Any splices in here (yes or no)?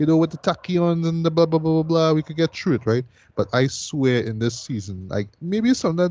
no